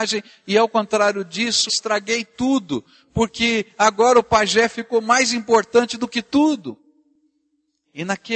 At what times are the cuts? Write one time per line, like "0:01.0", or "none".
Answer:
none